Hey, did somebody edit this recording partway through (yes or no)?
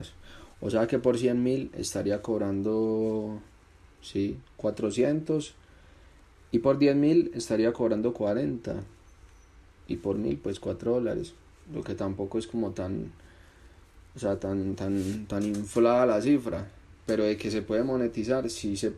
no